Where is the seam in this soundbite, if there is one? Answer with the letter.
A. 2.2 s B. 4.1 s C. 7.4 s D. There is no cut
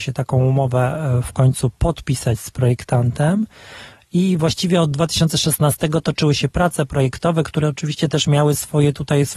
D